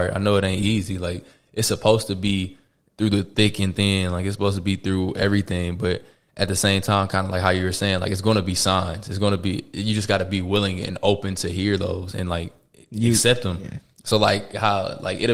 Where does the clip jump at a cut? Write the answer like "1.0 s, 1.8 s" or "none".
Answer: none